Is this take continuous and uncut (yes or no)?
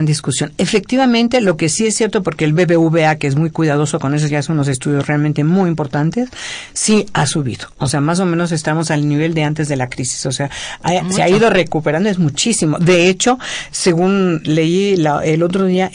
yes